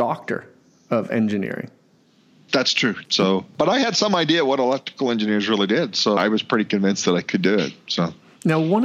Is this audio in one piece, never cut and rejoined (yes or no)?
no